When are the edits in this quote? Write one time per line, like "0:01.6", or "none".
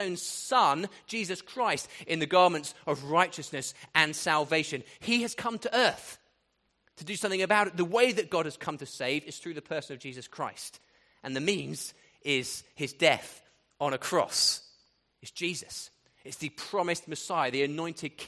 0:15.2